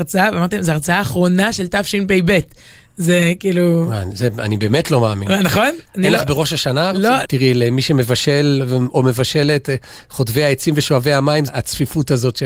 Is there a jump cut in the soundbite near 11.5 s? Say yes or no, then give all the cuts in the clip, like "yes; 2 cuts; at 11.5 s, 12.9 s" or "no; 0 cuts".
yes; 2 cuts; at 7.2 s, 11.5 s